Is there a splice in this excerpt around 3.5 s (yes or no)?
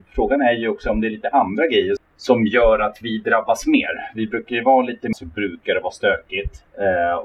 no